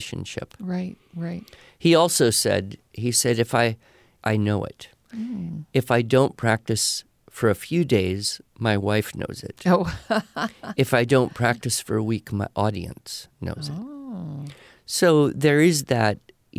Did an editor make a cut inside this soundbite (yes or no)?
yes